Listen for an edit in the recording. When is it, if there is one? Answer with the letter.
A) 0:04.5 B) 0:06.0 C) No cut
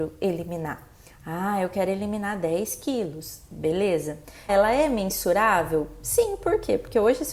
A